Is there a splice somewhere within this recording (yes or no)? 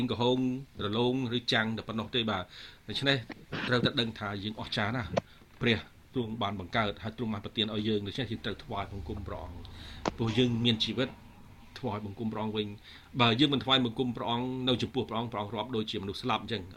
no